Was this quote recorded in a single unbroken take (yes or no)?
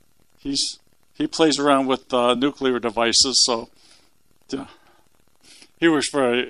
yes